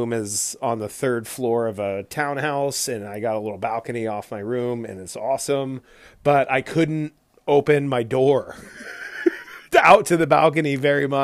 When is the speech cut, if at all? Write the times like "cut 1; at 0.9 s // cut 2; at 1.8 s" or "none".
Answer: none